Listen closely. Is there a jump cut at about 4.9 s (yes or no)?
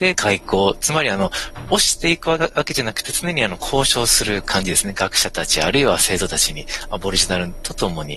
no